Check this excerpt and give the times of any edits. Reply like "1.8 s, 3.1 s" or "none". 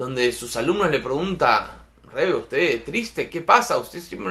3.3 s